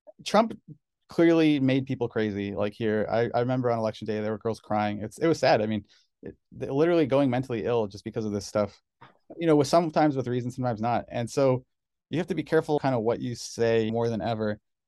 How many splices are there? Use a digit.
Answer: 2